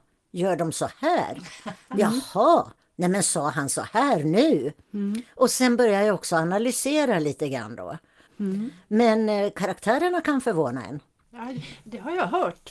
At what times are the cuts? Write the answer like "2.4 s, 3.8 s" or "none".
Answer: 8.3 s, 11.2 s